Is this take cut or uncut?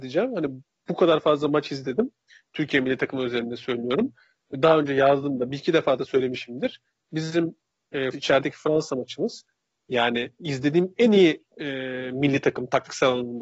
cut